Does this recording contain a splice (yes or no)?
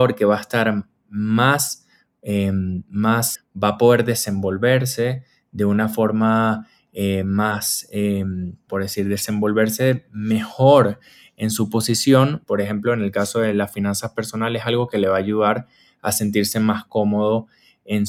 yes